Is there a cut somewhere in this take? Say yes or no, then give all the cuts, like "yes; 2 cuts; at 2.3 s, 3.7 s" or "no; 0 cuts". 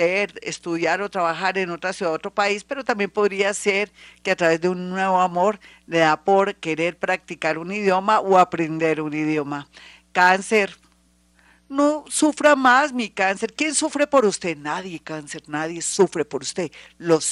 no; 0 cuts